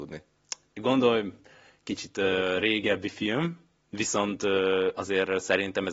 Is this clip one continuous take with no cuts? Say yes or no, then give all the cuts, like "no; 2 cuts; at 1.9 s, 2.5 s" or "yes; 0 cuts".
yes; 0 cuts